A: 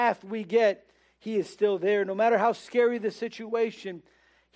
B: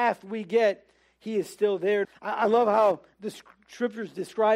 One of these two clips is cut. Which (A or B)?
B